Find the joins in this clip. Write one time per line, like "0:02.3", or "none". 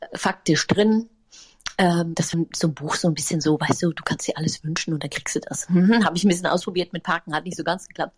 0:02.3